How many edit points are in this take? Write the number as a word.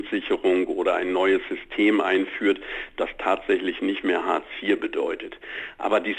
zero